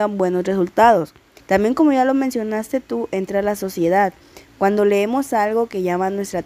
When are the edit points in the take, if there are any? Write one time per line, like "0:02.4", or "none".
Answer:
0:01.4
0:04.5